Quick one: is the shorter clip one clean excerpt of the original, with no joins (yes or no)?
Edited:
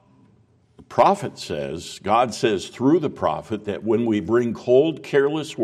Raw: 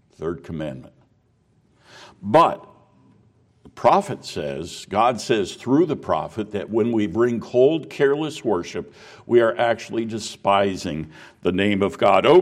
yes